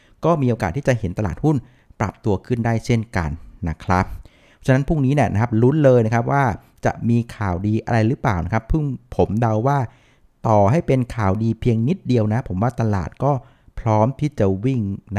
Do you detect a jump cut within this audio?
no; 0 cuts

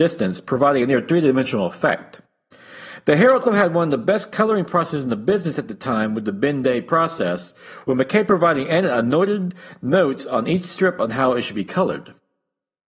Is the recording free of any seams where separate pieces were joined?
no; 1 cut; at 3.5 s

